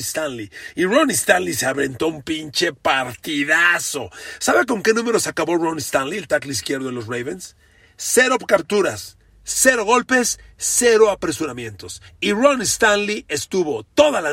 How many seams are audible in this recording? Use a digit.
0